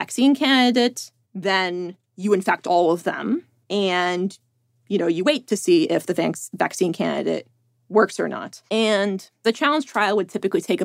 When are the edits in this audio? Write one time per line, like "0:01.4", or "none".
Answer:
0:01.2
0:08.7